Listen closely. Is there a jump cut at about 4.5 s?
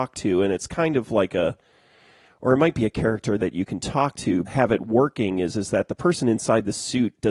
yes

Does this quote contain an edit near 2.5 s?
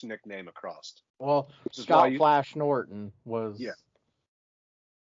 no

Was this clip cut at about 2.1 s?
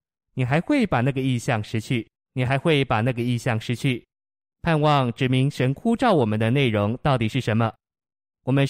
yes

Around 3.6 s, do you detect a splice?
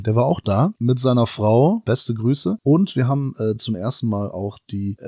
no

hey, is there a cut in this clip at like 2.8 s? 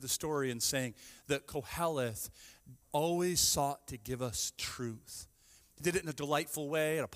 yes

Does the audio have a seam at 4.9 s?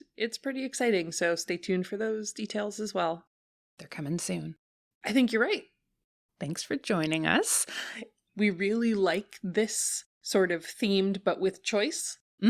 yes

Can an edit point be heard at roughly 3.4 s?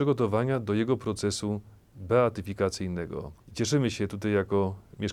yes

